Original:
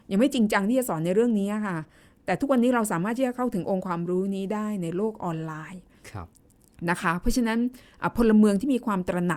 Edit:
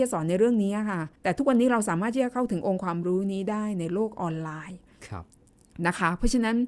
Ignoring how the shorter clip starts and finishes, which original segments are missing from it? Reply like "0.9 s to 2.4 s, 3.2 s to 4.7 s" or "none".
1.9 s to 2.2 s